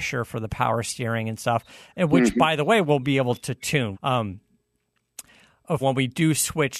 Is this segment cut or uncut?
cut